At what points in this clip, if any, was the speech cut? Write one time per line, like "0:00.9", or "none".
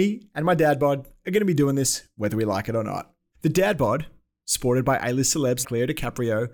0:03.3
0:05.6